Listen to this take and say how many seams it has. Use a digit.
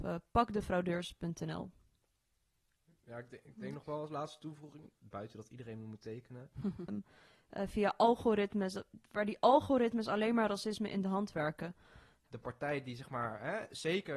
2